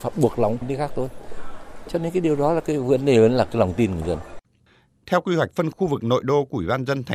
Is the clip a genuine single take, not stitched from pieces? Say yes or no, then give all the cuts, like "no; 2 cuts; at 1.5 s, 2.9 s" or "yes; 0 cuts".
no; 1 cut; at 5.7 s